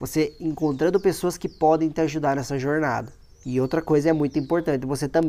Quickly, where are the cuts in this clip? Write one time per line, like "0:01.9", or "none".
0:03.4